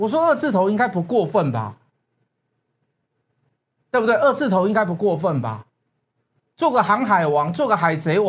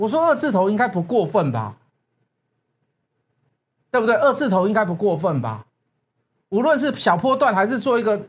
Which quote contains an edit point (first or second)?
second